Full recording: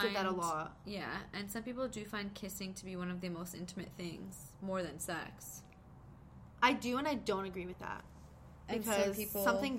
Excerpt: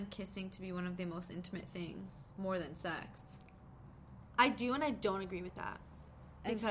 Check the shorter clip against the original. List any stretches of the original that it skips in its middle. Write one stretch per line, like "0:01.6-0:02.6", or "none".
none